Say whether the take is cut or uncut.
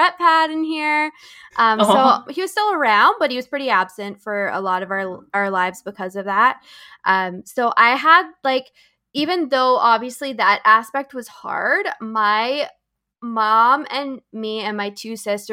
cut